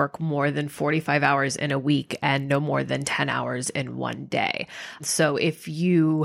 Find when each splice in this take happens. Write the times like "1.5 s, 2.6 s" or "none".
5.0 s